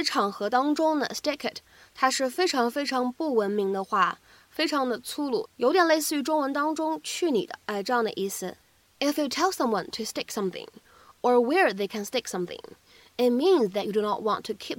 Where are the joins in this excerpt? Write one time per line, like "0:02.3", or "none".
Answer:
none

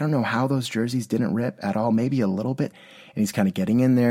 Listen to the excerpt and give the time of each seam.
0:02.7

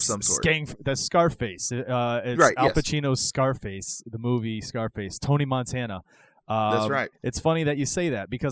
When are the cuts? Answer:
0:07.1

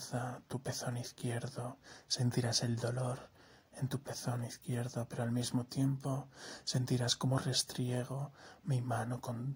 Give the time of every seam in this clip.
none

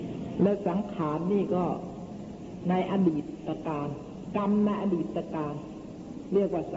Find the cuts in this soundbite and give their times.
none

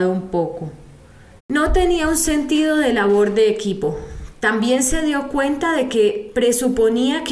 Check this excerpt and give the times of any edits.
0:01.4

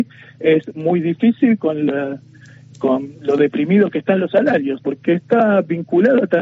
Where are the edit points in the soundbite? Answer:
0:04.8

